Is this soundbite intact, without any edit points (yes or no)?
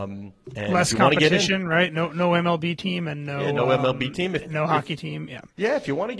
yes